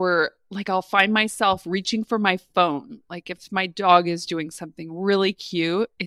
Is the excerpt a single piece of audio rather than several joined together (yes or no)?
yes